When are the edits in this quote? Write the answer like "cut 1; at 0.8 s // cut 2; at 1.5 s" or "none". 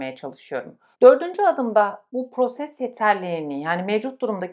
cut 1; at 0.9 s // cut 2; at 2.1 s

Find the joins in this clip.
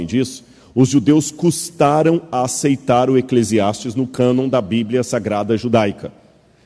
none

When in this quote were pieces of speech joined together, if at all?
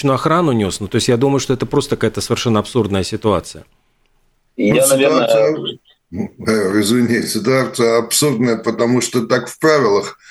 none

